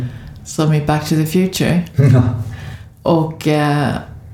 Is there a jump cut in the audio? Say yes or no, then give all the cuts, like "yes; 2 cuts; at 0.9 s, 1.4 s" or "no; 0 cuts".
no; 0 cuts